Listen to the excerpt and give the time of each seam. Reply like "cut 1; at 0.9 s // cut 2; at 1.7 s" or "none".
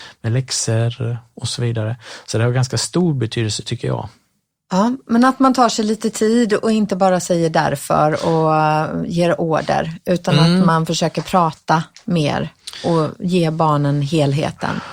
none